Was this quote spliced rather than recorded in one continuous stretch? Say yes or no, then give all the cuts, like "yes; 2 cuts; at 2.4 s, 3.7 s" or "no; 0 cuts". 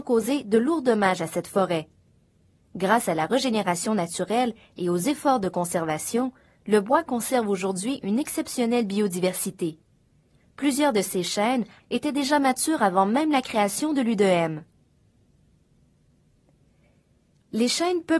yes; 1 cut; at 11.8 s